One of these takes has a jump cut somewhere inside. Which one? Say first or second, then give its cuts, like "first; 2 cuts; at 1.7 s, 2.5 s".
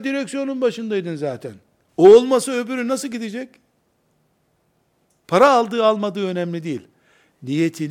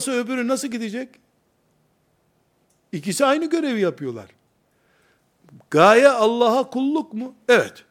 first; 2 cuts; at 1.9 s, 5.2 s